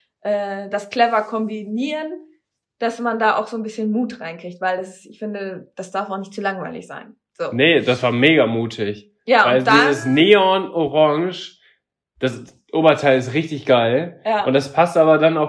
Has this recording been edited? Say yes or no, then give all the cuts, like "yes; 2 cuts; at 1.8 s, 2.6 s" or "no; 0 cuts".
no; 0 cuts